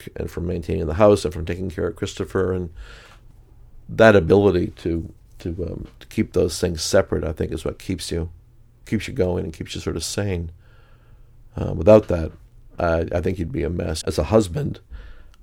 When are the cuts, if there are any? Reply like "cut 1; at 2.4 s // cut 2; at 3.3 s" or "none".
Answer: cut 1; at 14.0 s